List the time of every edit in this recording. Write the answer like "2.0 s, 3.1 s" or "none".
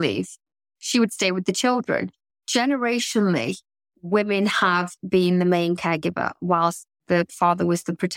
2.3 s